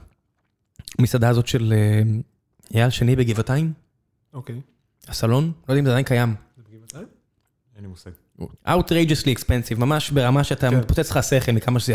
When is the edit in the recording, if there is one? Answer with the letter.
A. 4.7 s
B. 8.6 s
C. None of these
B